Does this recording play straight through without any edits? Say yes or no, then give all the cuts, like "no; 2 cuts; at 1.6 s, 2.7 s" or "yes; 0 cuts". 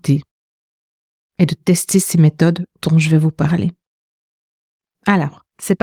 yes; 0 cuts